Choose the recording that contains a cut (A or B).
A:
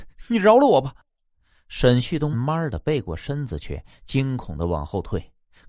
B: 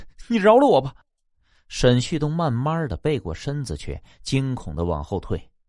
A